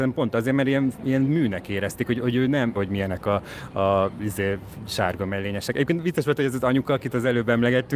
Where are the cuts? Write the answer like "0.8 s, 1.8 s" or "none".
2.7 s